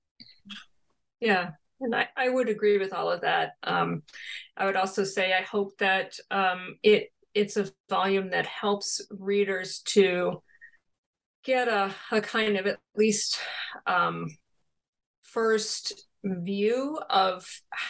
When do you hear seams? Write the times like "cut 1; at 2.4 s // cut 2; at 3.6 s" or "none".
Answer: none